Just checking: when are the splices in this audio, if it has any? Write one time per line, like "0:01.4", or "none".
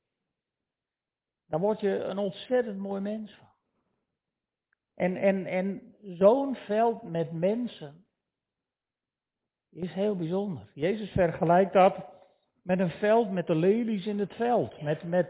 none